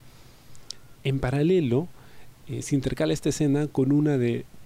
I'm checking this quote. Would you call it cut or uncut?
cut